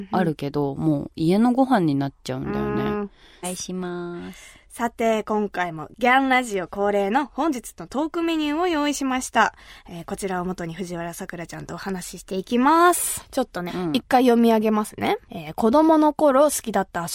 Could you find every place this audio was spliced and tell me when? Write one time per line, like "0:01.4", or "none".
0:03.4
0:13.7